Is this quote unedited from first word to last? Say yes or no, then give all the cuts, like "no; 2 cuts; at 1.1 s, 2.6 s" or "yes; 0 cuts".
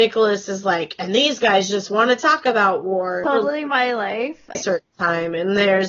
no; 2 cuts; at 3.2 s, 4.5 s